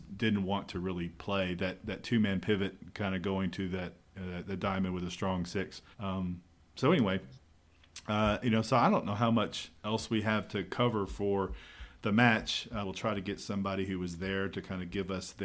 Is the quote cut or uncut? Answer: cut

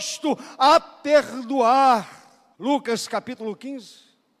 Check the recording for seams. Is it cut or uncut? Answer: cut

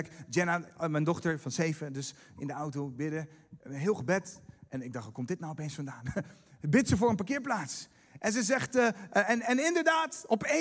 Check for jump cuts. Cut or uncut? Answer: uncut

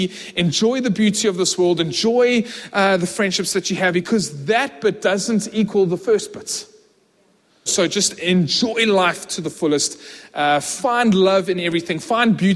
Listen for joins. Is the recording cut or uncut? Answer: cut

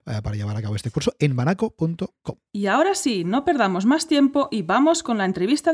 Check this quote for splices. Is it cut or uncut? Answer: cut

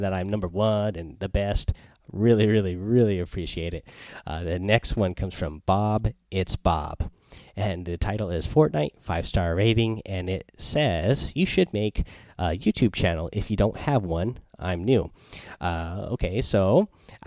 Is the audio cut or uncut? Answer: uncut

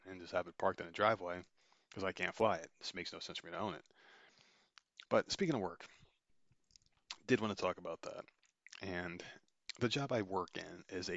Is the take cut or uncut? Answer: cut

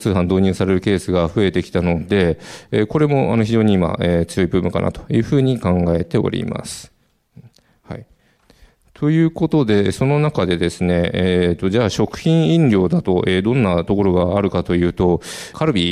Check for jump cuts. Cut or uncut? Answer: uncut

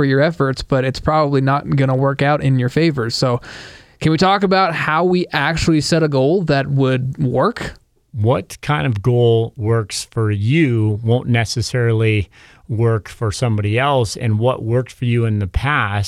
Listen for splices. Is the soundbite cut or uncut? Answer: uncut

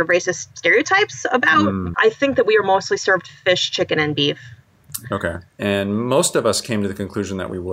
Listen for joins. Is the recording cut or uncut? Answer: cut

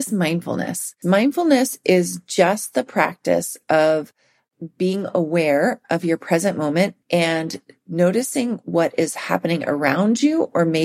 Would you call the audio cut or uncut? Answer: cut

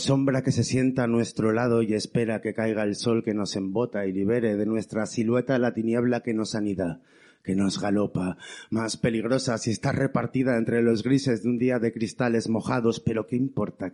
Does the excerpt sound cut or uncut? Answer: uncut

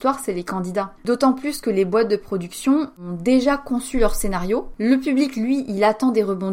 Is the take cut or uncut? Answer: uncut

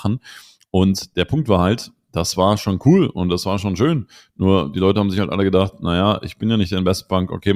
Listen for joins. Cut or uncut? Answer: uncut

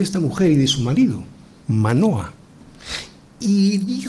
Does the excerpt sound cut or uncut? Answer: uncut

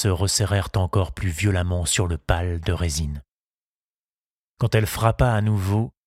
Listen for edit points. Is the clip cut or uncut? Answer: cut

